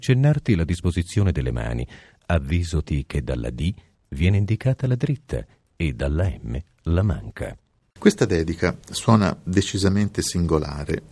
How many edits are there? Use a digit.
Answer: 1